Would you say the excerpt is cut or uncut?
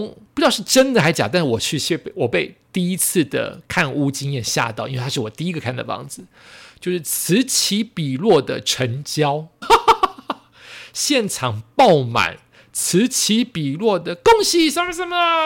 cut